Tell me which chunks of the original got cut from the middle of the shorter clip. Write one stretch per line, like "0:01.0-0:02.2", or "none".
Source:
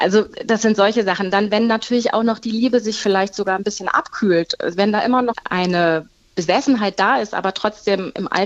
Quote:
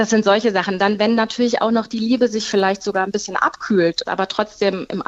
0:04.6-0:07.3